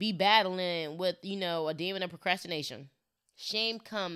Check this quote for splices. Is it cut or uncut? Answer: cut